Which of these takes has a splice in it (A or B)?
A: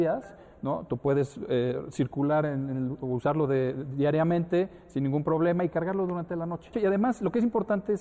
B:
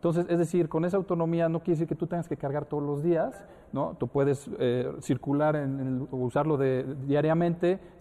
A